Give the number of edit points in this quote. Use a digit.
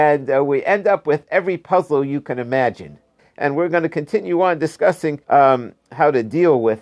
2